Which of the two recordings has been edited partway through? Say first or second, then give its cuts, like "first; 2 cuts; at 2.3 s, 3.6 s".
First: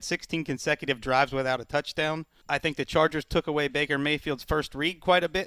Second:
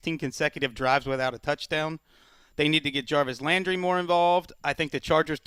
first; 1 cut; at 2.4 s